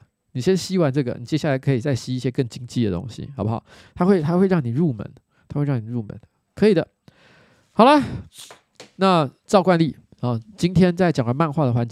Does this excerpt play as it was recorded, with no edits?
yes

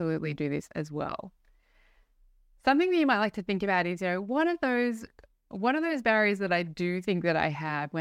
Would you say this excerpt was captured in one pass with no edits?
yes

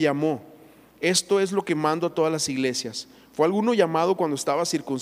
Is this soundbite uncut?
yes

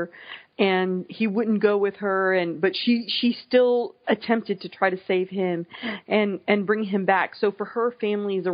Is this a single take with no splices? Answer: yes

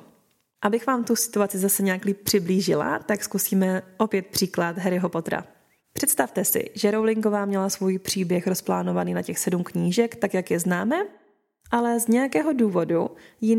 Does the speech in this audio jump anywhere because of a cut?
no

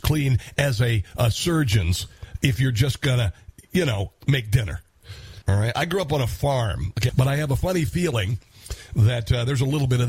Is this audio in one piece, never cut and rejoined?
no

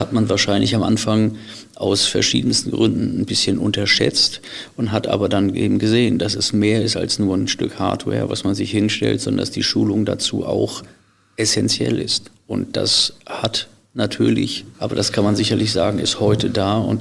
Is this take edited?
yes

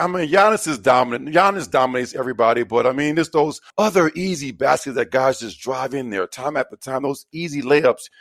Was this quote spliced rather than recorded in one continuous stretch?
yes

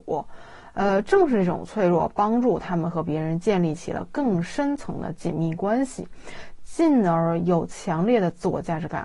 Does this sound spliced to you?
no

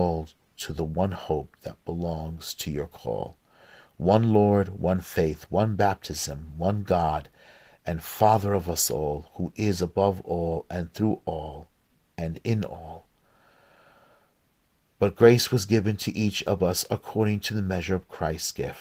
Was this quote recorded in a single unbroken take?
yes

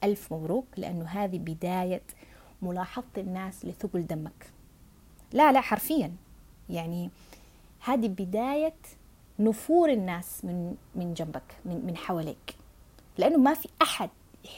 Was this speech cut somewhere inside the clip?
no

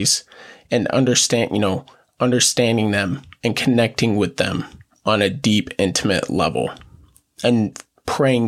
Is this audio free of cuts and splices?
yes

